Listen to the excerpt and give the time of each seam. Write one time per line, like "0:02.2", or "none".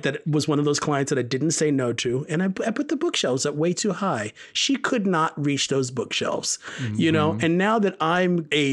none